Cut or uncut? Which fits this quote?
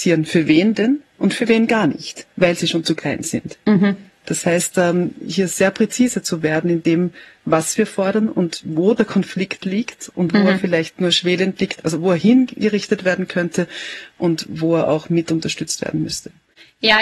uncut